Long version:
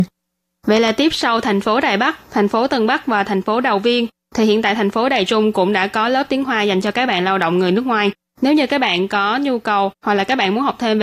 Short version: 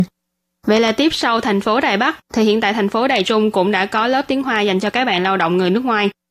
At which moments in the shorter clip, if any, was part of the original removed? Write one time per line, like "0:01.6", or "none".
0:02.2